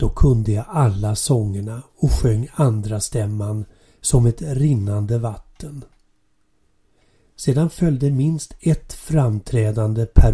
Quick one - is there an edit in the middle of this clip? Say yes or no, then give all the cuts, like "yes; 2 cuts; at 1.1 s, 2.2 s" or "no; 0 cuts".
no; 0 cuts